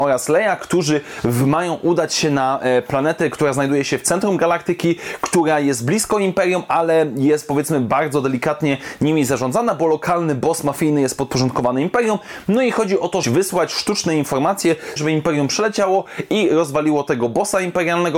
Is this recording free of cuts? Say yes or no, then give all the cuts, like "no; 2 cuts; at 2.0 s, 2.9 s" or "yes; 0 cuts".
no; 2 cuts; at 13.2 s, 15.0 s